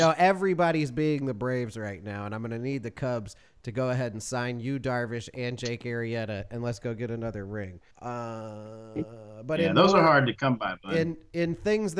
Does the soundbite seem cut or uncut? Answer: cut